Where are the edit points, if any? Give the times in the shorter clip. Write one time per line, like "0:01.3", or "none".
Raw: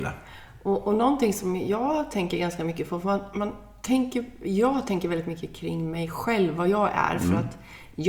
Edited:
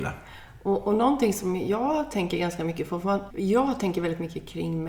0:03.3